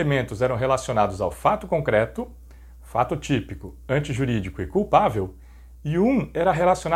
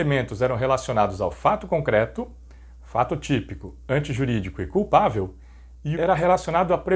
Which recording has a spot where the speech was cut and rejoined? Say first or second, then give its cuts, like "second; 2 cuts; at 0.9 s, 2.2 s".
second; 1 cut; at 5.9 s